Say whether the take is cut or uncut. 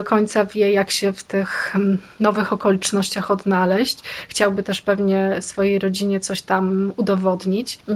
uncut